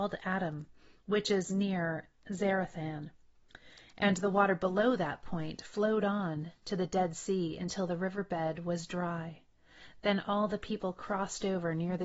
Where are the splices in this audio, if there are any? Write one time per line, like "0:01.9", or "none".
none